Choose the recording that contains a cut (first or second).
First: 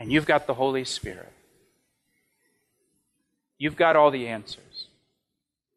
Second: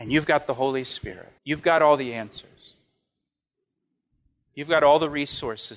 second